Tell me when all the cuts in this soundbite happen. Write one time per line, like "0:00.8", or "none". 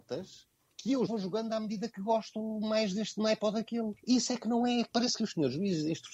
0:01.1

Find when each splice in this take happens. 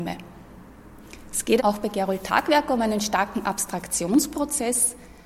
0:01.6

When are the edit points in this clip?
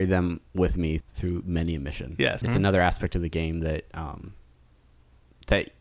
0:01.0
0:02.4

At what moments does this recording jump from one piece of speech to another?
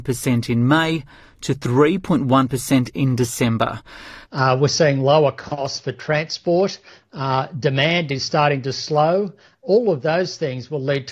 0:04.2

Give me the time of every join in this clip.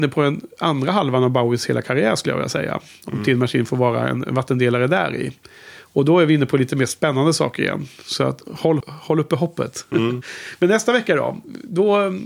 0:08.8

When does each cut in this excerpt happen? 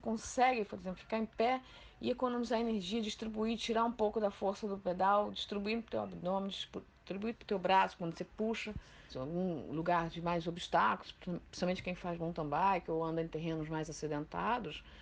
0:07.3
0:09.1

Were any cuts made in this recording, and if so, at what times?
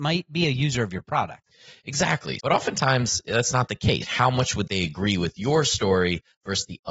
0:02.4
0:04.0

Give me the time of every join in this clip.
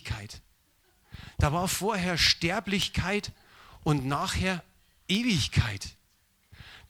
none

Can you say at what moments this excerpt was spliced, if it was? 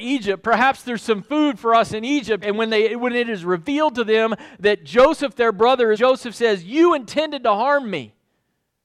0:02.4
0:05.9

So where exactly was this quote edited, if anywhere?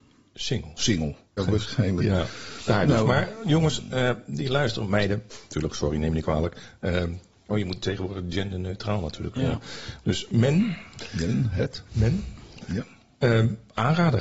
0:01.4

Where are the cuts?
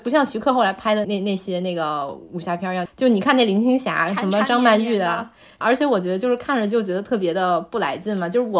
0:01.0
0:02.9
0:05.6

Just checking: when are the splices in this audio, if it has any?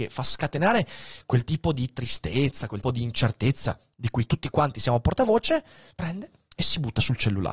0:02.8
0:05.9

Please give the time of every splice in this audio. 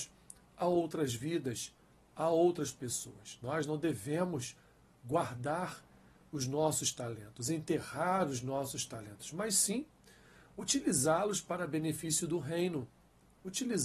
none

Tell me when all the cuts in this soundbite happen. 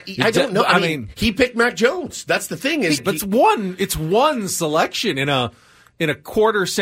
0:03.0

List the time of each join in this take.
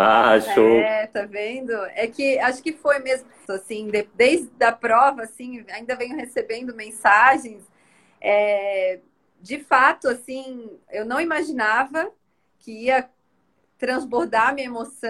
0:03.5

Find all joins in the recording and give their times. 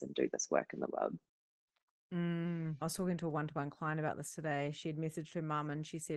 0:02.8

